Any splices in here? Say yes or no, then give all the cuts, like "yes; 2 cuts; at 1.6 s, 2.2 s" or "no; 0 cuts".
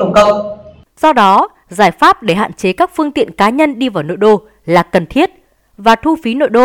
yes; 1 cut; at 0.9 s